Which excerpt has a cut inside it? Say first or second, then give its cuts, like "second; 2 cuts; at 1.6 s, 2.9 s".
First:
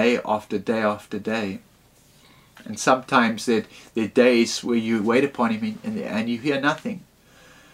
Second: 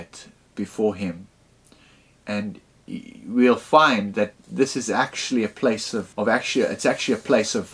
second; 1 cut; at 6.1 s